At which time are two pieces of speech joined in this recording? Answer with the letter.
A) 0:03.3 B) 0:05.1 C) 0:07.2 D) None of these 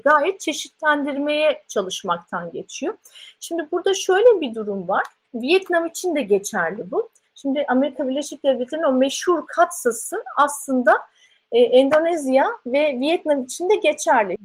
C